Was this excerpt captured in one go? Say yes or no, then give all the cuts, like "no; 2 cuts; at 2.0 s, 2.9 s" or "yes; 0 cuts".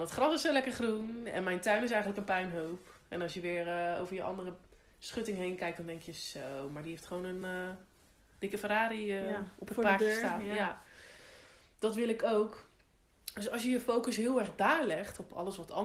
yes; 0 cuts